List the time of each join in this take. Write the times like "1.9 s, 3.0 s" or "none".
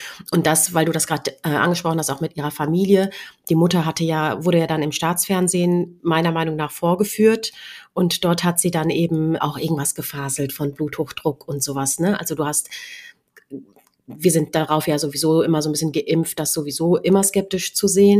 9.4 s